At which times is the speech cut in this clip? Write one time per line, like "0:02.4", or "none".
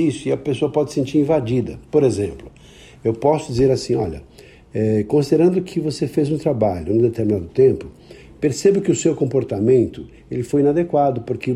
none